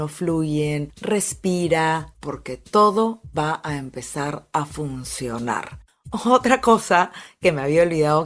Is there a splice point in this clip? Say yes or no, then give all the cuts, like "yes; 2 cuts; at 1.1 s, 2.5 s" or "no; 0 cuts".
yes; 1 cut; at 2.1 s